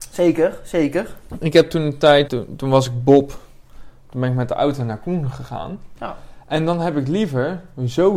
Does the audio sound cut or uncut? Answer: cut